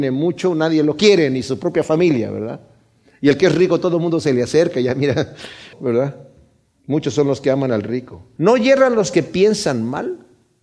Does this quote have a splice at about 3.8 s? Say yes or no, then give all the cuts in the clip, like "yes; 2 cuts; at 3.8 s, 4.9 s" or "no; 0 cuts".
no; 2 cuts; at 5.7 s, 8.4 s